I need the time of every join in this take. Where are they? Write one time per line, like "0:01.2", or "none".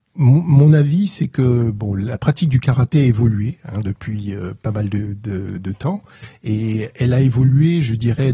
0:05.6
0:06.9